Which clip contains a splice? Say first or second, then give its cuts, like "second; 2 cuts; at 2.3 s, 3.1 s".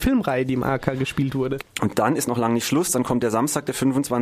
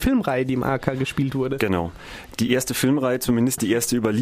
first; 1 cut; at 1.6 s